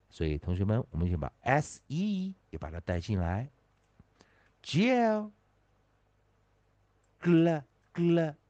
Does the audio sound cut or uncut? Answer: cut